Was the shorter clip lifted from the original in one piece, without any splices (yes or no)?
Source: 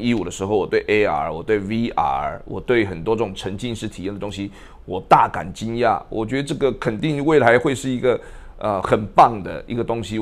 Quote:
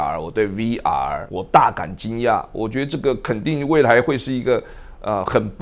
no